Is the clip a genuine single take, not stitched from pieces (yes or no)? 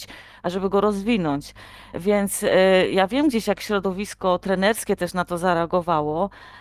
yes